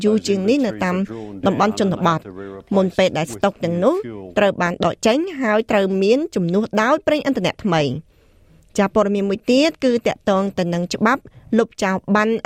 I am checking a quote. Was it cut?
no; 0 cuts

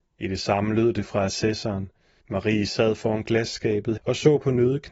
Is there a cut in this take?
yes; 2 cuts; at 2.2 s, 4.0 s

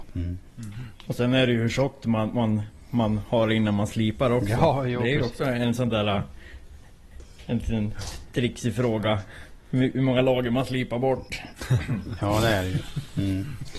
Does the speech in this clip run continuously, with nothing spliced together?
yes; 0 cuts

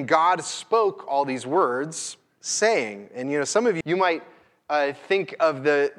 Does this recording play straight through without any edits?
no; 1 cut; at 3.8 s

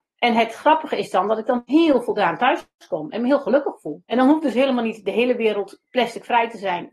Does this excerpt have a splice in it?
yes; 1 cut; at 4.0 s

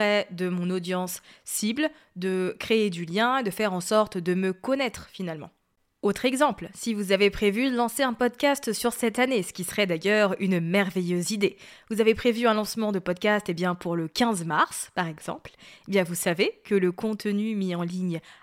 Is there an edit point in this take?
no; 0 cuts

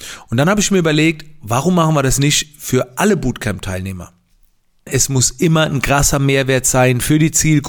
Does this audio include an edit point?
yes; 1 cut; at 4.9 s

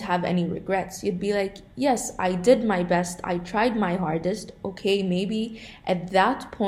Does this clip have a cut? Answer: no; 0 cuts

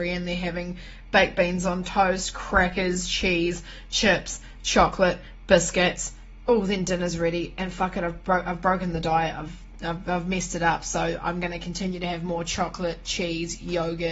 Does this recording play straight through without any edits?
yes; 0 cuts

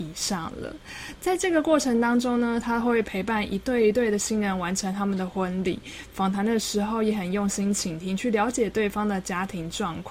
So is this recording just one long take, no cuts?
yes; 0 cuts

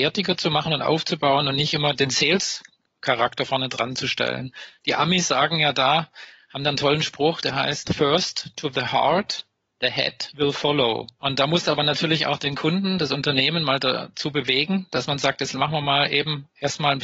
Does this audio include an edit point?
no; 0 cuts

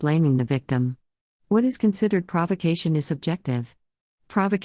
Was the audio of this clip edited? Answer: no; 0 cuts

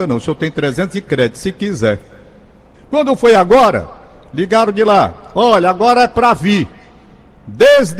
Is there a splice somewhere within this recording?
yes; 1 cut; at 2.7 s

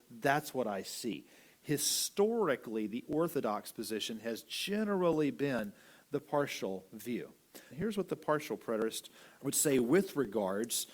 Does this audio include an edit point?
yes; 2 cuts; at 7.7 s, 9.4 s

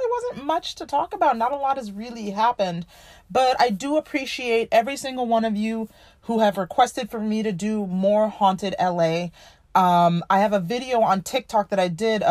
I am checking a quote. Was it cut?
no; 0 cuts

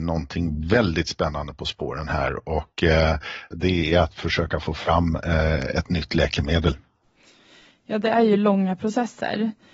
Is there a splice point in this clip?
yes; 1 cut; at 3.5 s

